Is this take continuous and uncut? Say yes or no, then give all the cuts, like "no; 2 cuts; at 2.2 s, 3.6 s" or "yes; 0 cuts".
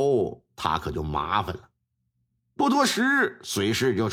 no; 1 cut; at 2.4 s